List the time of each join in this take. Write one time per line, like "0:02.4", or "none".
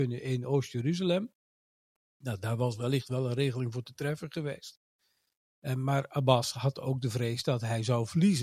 none